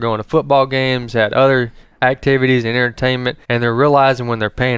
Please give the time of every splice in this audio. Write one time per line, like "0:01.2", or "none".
0:03.4